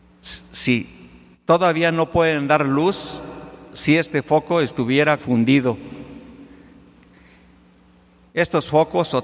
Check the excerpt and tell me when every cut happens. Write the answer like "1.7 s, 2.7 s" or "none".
5.2 s